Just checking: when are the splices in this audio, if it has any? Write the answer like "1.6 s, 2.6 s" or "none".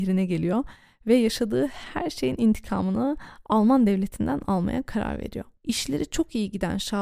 5.6 s